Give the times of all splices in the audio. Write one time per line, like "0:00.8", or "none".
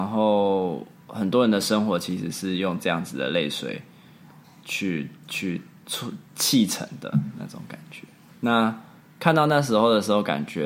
0:08.3